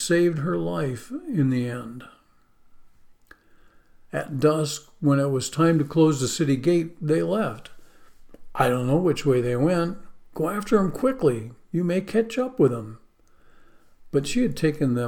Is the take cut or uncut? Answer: cut